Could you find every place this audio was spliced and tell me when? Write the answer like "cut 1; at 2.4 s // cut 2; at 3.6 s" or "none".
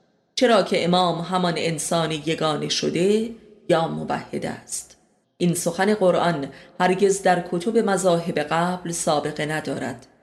cut 1; at 5.2 s

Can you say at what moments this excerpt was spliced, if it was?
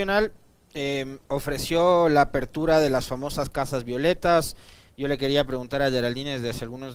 none

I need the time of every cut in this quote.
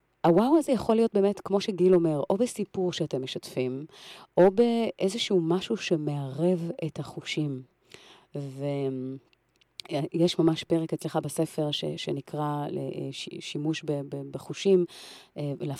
none

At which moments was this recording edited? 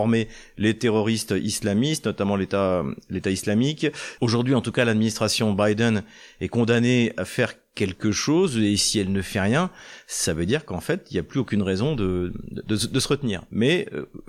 cut 1; at 4.2 s

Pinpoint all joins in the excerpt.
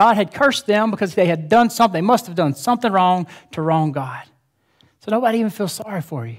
none

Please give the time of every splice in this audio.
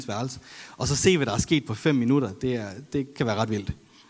none

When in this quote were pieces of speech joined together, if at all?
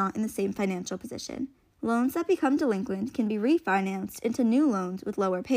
cut 1; at 1.7 s

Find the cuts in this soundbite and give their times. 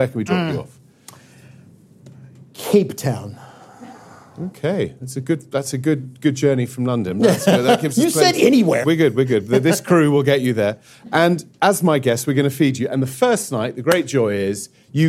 cut 1; at 8.8 s

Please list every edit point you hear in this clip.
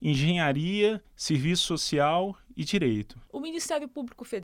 cut 1; at 3.3 s

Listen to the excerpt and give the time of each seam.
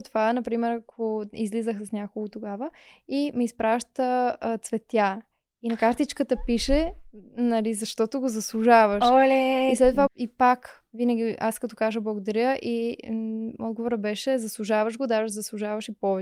cut 1; at 10.1 s

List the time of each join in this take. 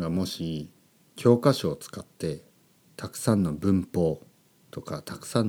none

